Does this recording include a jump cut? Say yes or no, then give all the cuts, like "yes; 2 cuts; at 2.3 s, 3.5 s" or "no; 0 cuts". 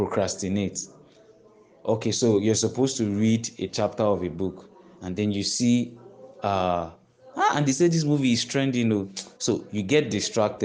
yes; 2 cuts; at 7.3 s, 9.3 s